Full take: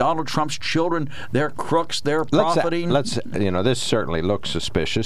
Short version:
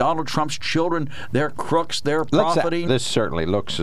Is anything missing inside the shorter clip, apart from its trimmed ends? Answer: yes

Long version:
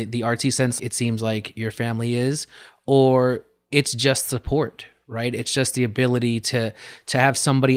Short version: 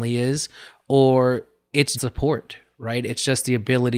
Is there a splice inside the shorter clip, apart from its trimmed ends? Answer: yes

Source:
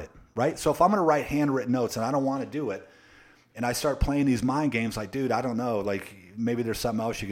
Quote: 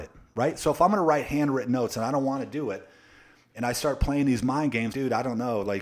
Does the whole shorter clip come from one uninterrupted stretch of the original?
no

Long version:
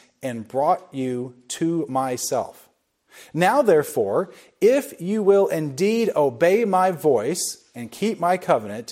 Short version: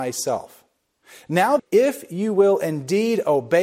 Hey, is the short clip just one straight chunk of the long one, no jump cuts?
no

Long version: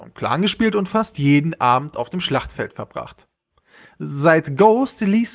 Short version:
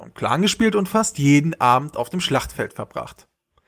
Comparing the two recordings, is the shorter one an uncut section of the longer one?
yes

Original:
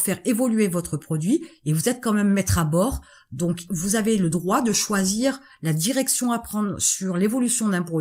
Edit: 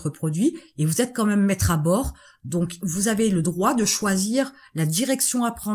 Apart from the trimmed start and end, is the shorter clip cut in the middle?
no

